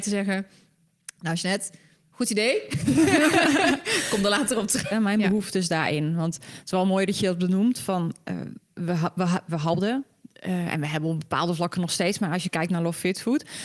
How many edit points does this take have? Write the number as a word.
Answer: one